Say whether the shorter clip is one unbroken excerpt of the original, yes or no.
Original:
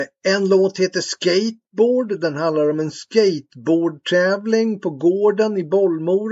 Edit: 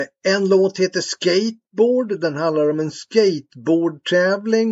yes